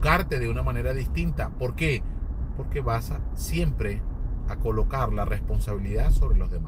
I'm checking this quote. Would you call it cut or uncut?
uncut